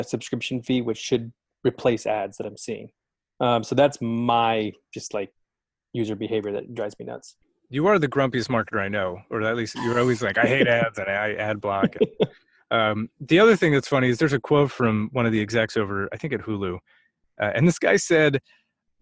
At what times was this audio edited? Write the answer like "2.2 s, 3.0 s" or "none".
none